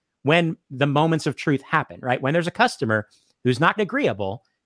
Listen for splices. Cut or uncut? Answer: cut